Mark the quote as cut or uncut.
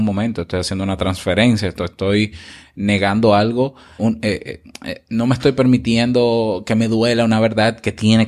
cut